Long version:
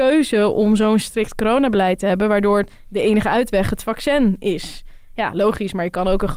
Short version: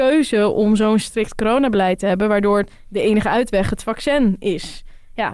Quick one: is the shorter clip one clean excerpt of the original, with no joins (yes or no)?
yes